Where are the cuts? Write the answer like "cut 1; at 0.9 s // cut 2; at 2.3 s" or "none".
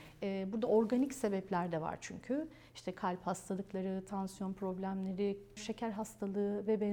cut 1; at 5.6 s